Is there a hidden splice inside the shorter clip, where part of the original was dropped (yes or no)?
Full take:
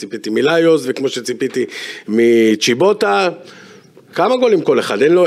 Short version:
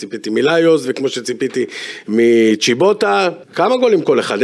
yes